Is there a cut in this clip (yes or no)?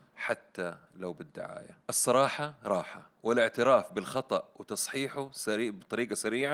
yes